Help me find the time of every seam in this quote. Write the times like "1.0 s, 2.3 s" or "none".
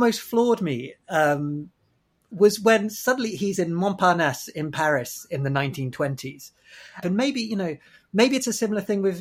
7.0 s